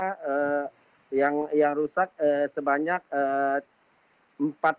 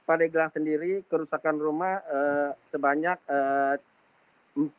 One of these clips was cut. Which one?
second; 1 cut; at 2.7 s

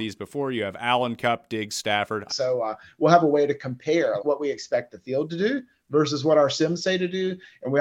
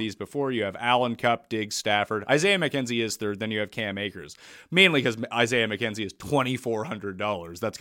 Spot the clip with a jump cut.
first; 2 cuts; at 2.3 s, 4.2 s

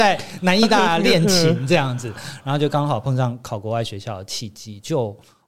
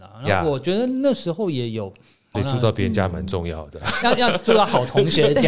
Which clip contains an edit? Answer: second; 2 cuts; at 2.3 s, 4.0 s

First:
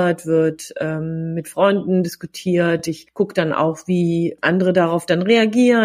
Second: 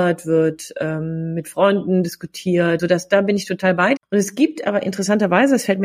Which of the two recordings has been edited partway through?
second; 2 cuts; at 2.8 s, 4.0 s

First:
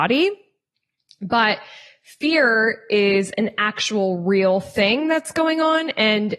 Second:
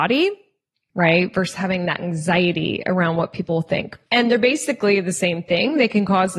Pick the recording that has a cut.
second; 2 cuts; at 0.9 s, 4.1 s

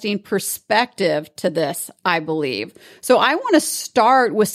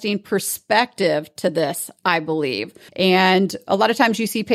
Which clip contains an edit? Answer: second; 1 cut; at 2.9 s

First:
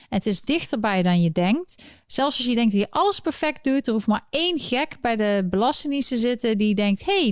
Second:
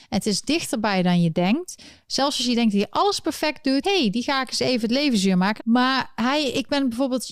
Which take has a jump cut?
second; 2 cuts; at 3.8 s, 5.6 s

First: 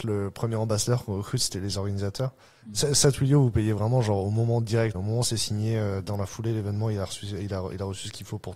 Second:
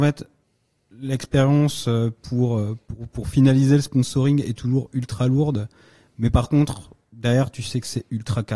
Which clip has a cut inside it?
first; 1 cut; at 4.9 s

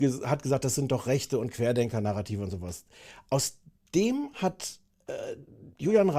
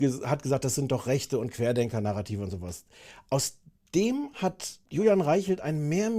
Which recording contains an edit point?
second; 1 cut; at 4.9 s

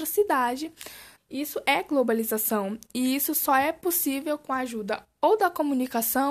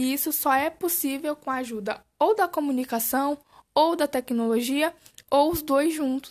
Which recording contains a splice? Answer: first; 1 cut; at 1.2 s

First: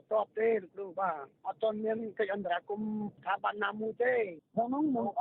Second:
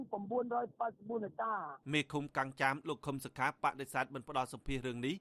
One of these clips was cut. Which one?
second; 1 cut; at 1.8 s

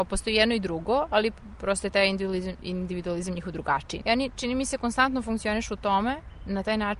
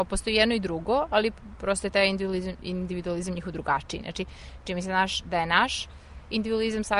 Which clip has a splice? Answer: first; 1 cut; at 4.0 s

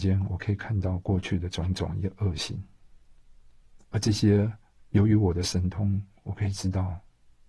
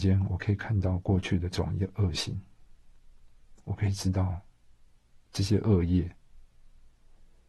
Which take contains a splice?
second; 2 cuts; at 1.5 s, 3.6 s

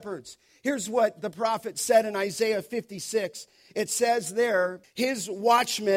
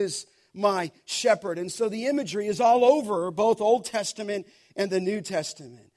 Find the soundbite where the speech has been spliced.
first; 1 cut; at 4.8 s

